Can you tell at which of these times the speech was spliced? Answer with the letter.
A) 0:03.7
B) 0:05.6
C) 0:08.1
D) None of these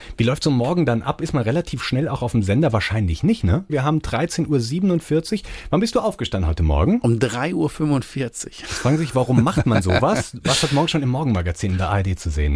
A